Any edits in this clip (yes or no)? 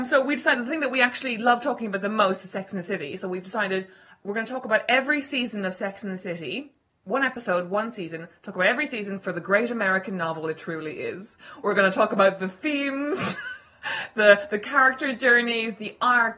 no